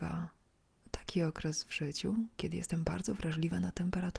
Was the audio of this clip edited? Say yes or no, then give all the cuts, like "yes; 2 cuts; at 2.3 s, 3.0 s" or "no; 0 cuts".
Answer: no; 0 cuts